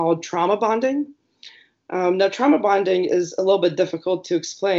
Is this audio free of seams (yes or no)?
yes